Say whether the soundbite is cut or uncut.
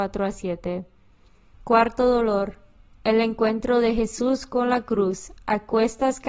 cut